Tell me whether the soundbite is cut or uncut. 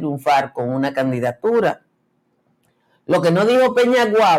uncut